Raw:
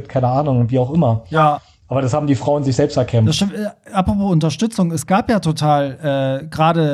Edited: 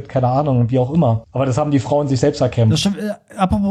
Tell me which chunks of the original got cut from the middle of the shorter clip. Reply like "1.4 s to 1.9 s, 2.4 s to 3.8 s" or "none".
1.2 s to 1.8 s